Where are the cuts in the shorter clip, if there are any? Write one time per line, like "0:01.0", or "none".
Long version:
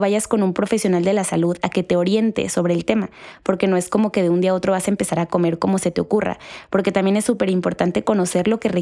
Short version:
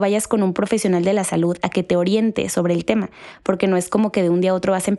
none